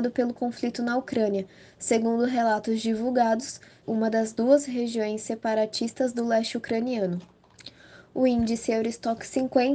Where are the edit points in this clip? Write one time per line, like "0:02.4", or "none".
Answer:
0:03.8